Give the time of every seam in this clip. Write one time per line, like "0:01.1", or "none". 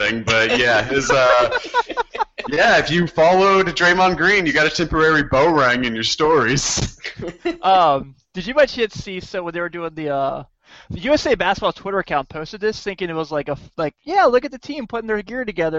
none